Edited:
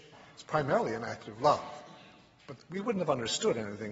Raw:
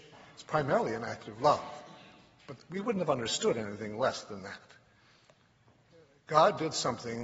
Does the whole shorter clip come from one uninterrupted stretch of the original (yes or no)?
yes